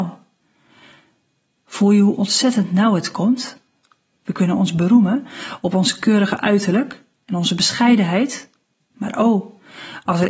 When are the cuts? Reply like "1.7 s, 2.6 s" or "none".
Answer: none